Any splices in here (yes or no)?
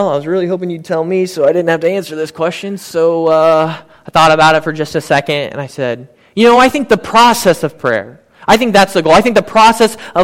no